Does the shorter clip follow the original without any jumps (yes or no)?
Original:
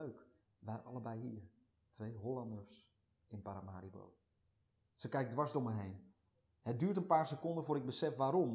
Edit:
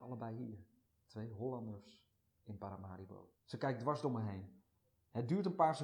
no